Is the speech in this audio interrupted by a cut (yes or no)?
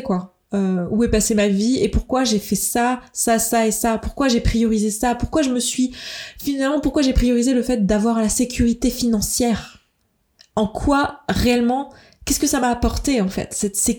no